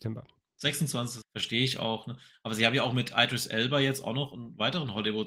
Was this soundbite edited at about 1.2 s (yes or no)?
yes